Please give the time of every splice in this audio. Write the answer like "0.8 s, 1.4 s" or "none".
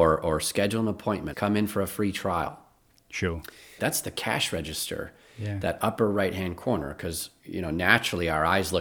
1.3 s, 3.8 s